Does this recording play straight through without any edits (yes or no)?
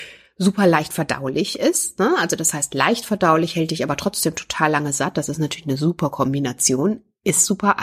yes